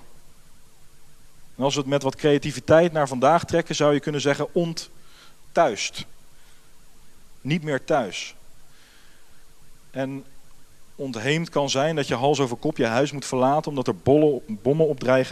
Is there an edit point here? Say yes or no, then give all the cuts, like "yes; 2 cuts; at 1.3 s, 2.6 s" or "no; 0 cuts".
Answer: yes; 1 cut; at 1.6 s